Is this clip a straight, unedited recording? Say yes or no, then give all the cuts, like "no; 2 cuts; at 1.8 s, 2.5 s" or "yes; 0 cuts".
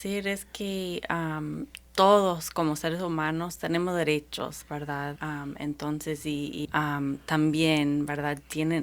no; 2 cuts; at 5.2 s, 6.6 s